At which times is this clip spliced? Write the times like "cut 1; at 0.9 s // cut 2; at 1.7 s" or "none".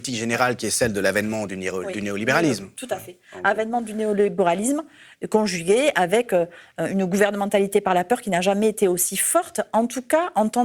none